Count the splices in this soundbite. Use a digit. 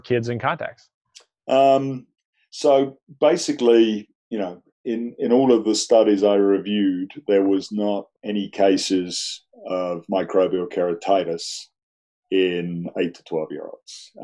2